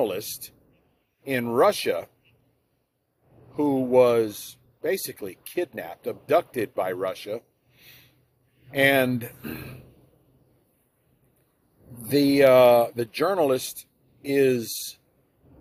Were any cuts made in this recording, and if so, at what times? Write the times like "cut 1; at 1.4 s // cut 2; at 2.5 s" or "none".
none